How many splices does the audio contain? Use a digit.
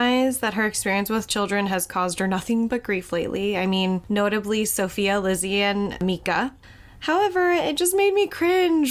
0